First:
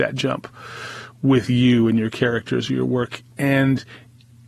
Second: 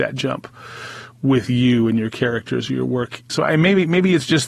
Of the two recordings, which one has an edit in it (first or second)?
second